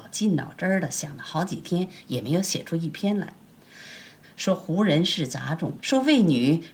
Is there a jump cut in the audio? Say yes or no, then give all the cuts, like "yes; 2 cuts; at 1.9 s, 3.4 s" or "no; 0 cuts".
yes; 2 cuts; at 4.2 s, 5.8 s